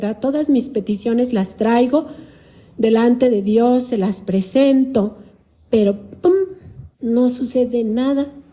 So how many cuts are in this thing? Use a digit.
1